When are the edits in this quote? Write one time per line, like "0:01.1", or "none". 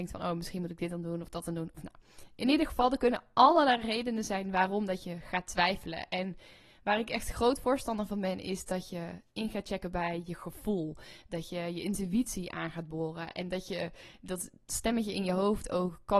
none